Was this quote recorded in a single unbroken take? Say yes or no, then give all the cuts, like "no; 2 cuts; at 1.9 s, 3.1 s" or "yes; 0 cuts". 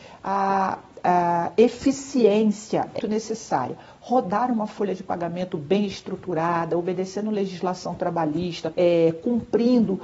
no; 2 cuts; at 3.0 s, 8.7 s